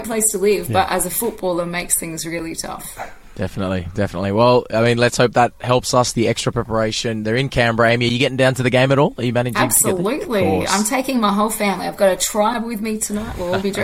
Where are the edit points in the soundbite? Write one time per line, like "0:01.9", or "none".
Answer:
none